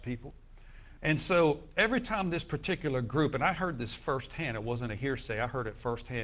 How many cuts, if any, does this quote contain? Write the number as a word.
one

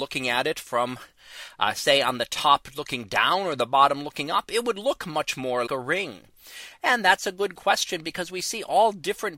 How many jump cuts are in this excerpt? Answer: one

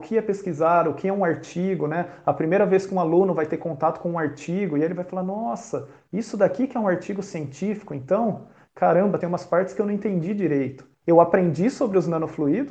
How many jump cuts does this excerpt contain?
two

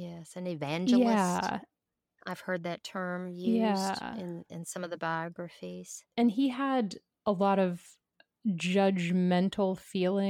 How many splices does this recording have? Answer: zero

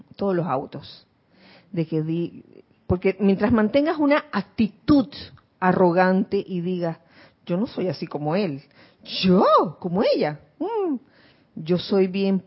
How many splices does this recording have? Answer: one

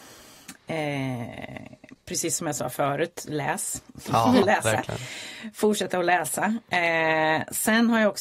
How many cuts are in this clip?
one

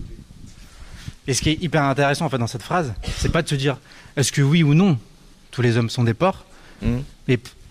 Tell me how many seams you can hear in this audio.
zero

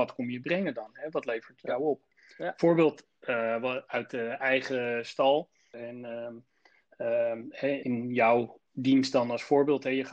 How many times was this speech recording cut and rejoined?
two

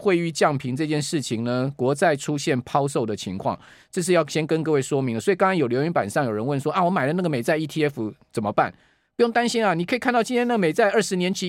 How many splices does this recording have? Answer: zero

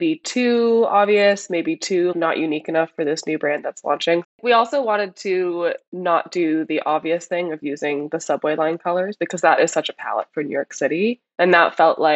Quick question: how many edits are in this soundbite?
three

